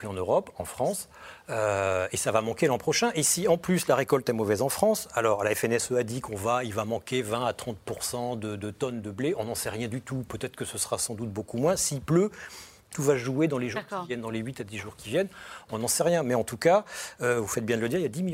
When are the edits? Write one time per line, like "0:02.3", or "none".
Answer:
none